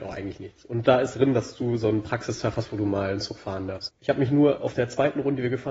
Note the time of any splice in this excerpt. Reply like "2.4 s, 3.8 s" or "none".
1.1 s, 3.9 s

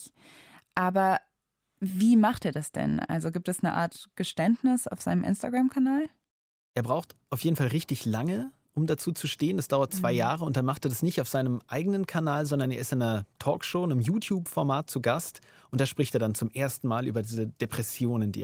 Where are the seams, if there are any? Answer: none

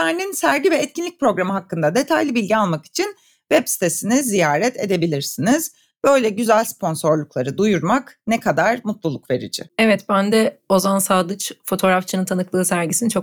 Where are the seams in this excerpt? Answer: 9.7 s

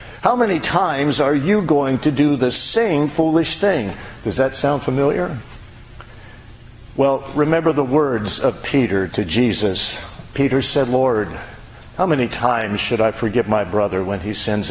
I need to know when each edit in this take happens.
none

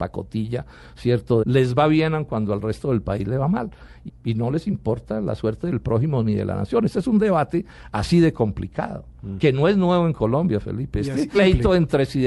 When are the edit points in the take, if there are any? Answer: 1.4 s, 4.1 s, 11.3 s

